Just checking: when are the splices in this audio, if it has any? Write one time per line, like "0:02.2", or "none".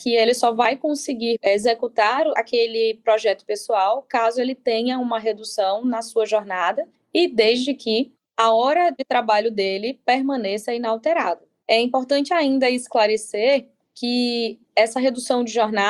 0:01.4